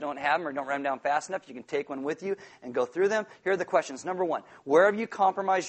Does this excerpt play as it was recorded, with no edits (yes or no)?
yes